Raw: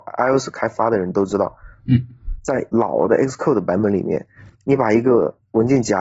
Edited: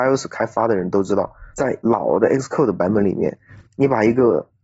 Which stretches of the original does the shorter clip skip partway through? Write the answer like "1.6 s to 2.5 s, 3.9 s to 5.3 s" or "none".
1.8 s to 2.4 s

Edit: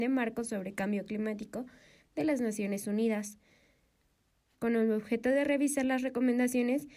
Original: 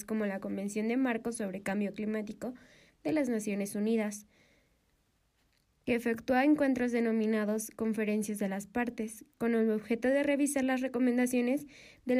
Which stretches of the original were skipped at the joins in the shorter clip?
5.4 s to 9.3 s

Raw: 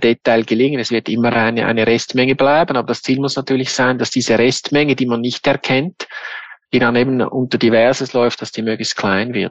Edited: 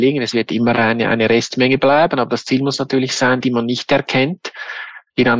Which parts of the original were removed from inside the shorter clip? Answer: 4.0 s to 5.0 s

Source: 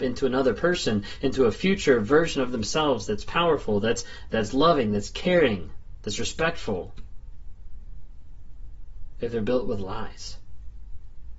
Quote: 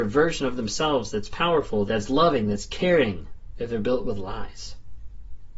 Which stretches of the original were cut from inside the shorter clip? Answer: 3.8 s to 4.3 s, 6.0 s to 9.1 s

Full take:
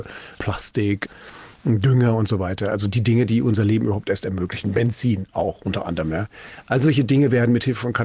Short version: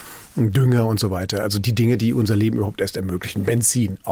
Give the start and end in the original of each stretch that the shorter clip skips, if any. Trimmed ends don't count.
none

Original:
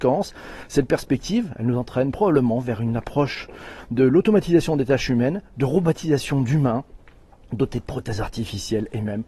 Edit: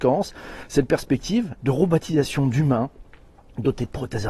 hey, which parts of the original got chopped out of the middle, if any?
1.5 s to 5.5 s

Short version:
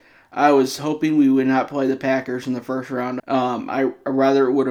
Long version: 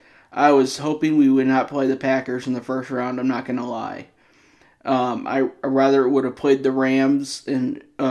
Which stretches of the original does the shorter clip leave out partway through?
3.2 s to 4.8 s

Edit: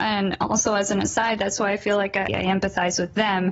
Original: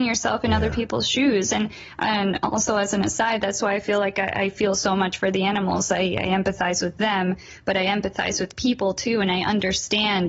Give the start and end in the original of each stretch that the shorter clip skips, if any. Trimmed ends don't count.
4.3 s to 6.1 s

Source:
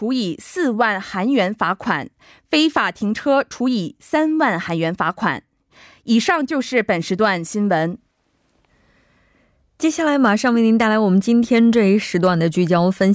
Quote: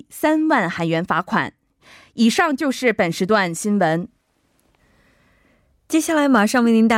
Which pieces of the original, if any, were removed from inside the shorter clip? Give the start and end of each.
none

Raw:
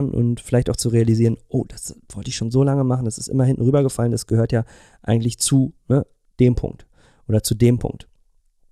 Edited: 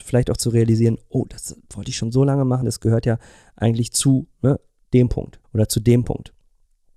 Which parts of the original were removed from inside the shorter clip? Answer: 3.0 s to 4.1 s, 6.9 s to 7.2 s

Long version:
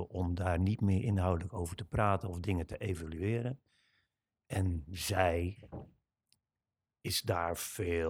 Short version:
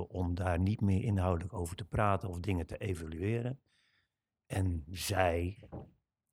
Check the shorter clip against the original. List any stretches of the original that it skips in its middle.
none

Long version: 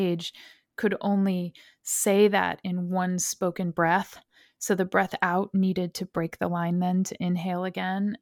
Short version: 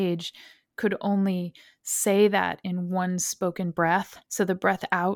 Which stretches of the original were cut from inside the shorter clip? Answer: 4.2 s to 4.5 s

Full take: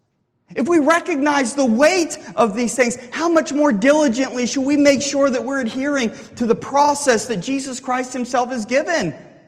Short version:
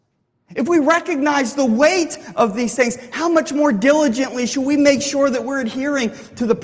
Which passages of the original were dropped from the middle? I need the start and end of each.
none

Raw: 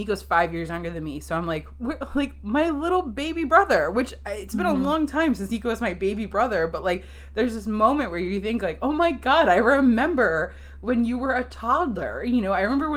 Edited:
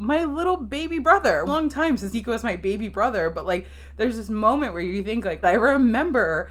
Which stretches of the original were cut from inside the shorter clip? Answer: 3.9 s to 4.8 s, 8.8 s to 9.5 s

